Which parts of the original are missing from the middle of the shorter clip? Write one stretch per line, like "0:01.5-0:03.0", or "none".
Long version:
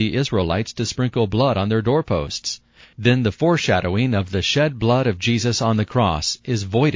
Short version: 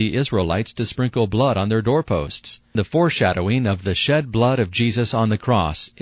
0:02.8-0:03.2